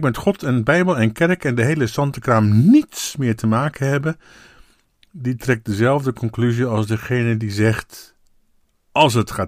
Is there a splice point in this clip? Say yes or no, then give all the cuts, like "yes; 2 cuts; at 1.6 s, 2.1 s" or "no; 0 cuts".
no; 0 cuts